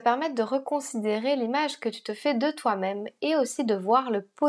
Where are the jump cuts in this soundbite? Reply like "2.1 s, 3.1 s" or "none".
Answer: none